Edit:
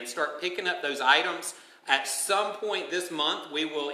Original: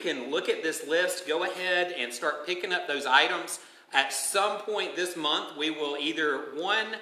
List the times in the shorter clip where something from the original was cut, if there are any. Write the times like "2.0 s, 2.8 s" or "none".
none